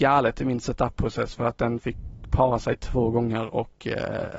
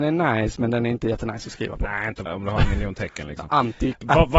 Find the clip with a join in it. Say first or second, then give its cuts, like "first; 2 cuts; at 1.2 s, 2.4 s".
second; 1 cut; at 2.3 s